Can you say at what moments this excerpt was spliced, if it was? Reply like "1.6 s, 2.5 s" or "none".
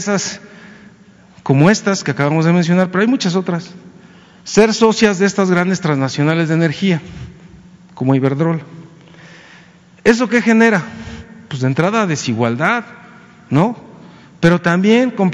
none